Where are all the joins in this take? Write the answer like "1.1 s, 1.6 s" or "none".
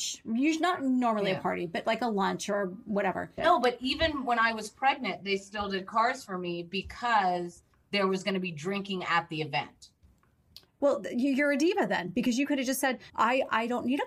3.4 s, 13.1 s